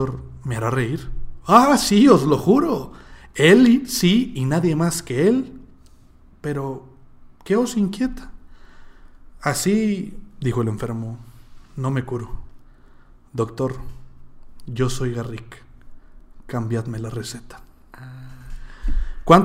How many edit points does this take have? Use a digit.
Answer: 1